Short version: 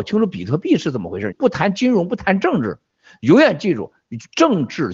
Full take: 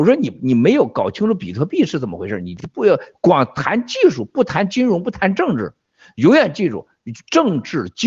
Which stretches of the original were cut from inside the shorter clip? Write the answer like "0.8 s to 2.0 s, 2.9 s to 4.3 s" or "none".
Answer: 2.4 s to 4.3 s